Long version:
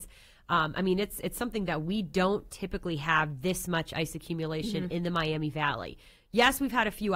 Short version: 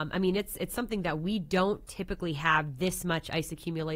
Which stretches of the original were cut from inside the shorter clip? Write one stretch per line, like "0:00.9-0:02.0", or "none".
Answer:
none

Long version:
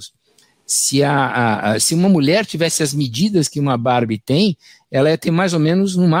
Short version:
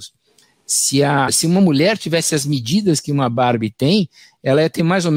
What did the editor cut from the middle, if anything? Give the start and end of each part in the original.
0:01.3-0:01.8

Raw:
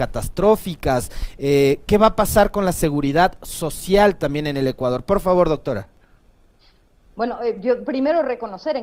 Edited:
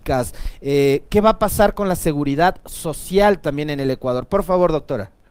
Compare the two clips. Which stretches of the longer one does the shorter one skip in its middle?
none

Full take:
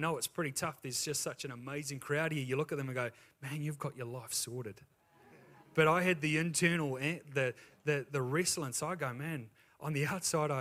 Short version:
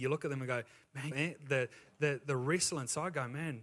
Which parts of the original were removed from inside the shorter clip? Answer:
0:03.6-0:07.0

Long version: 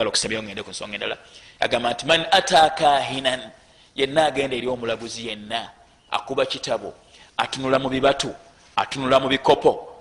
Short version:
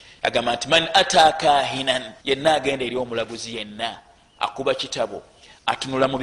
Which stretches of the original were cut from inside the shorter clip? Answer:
0:03.6-0:03.9

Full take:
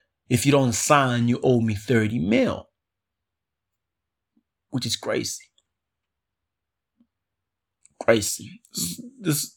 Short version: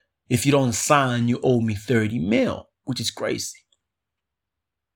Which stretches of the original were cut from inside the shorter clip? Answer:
0:02.7-0:04.6

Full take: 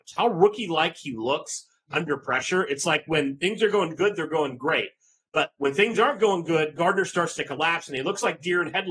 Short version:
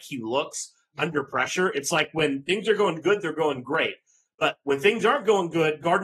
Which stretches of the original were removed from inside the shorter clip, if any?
none

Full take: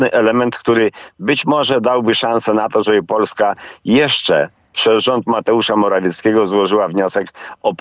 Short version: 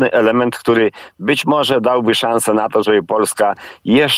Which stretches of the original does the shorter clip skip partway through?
none

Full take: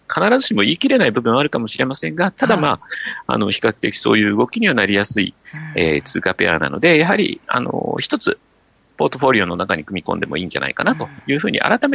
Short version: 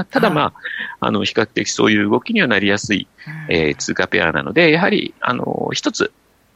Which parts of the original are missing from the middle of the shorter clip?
none

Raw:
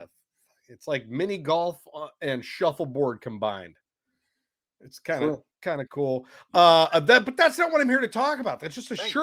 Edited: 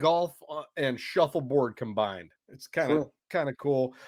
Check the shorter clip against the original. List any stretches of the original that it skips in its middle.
0:03.8-0:04.7

